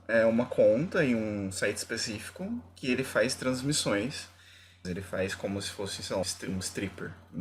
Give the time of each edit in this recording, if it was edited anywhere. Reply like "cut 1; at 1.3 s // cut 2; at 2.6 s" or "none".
cut 1; at 4.8 s // cut 2; at 6.2 s